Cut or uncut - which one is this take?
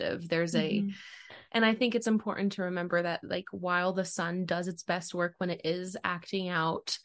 cut